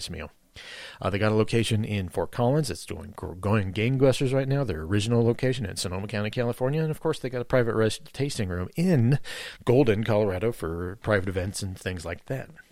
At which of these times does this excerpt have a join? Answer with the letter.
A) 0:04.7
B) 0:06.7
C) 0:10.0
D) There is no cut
D